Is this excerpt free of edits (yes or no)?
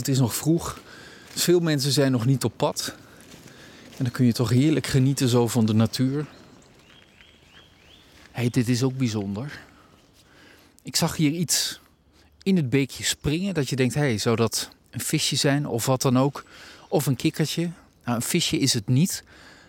yes